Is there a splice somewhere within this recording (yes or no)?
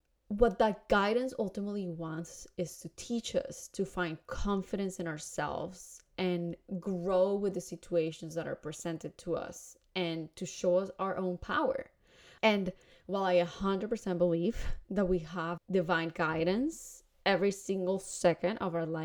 yes